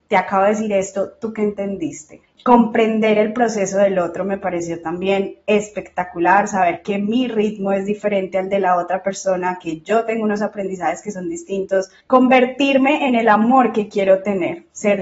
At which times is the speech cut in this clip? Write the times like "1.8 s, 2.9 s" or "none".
2.2 s, 12.0 s